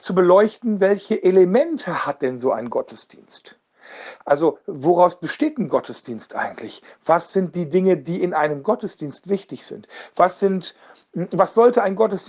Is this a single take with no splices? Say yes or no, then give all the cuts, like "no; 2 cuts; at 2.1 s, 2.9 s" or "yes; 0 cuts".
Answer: yes; 0 cuts